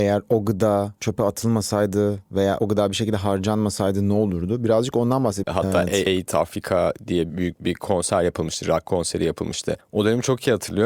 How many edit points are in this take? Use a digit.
1